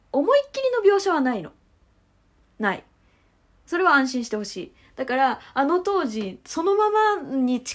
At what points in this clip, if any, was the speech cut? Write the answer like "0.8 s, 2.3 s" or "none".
none

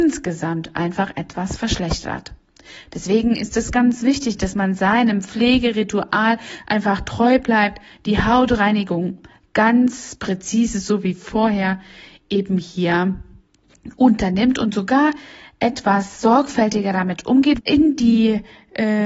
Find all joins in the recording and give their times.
17.6 s

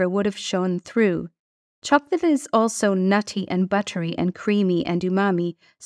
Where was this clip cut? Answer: none

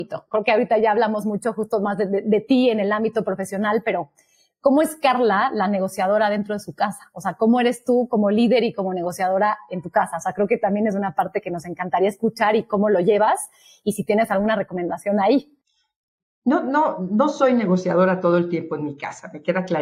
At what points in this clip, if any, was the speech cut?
none

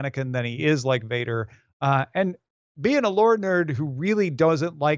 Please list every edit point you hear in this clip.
none

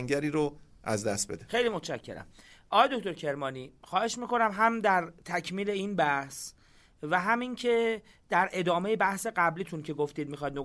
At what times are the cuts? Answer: none

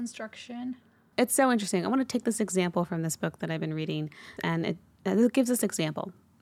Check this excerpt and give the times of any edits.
4.4 s

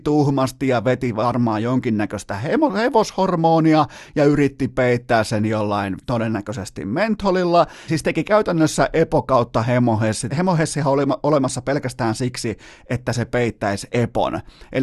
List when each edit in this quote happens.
7.9 s, 10.3 s

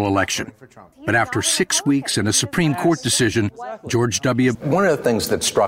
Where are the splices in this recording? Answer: 0.9 s, 4.5 s

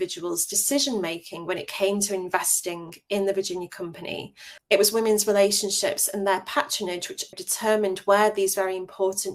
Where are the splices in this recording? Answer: 4.6 s, 7.3 s

